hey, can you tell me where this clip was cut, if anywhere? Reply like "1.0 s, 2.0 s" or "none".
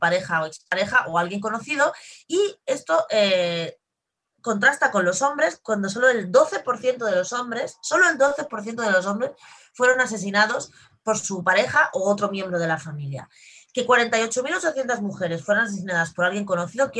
none